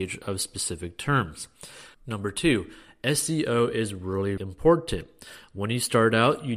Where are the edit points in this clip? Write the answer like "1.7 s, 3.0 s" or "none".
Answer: 1.9 s, 4.4 s

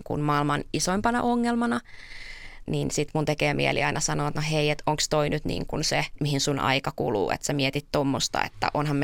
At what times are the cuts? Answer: none

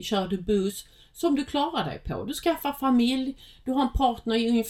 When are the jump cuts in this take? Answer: none

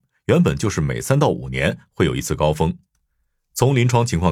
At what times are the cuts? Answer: none

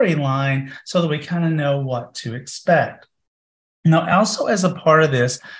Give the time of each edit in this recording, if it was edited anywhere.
none

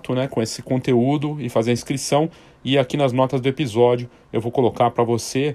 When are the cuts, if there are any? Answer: none

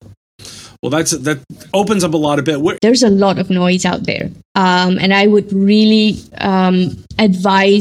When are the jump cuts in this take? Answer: 2.8 s

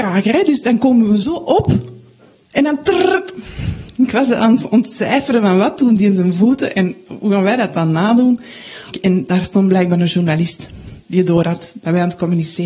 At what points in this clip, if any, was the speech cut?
8.9 s, 11.0 s

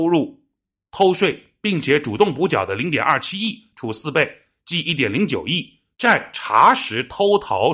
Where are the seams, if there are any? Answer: 5.9 s

